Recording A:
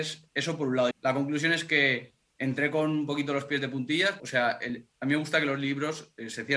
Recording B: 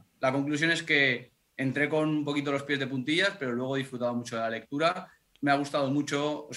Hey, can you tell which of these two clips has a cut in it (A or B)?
A